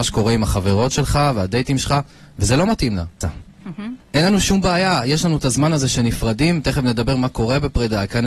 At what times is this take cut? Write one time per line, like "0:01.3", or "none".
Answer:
0:03.2